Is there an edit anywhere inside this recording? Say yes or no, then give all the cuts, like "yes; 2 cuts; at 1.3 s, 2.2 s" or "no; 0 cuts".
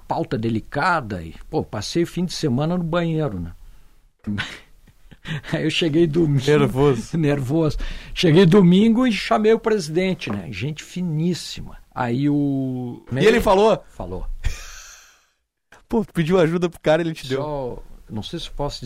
yes; 2 cuts; at 11.8 s, 13.1 s